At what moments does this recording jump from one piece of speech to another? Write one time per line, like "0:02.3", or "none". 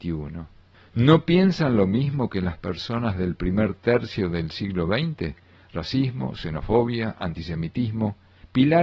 none